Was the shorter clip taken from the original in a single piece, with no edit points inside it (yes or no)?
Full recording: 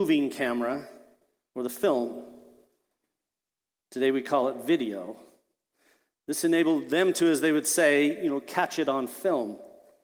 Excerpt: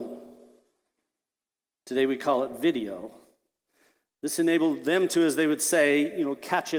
yes